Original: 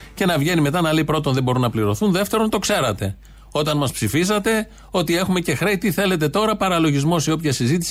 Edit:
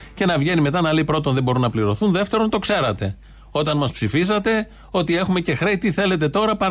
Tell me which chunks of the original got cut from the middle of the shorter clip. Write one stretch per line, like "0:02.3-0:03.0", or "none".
none